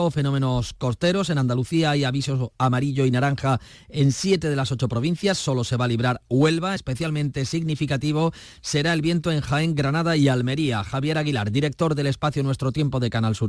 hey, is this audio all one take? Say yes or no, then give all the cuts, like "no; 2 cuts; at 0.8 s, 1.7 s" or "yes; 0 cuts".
yes; 0 cuts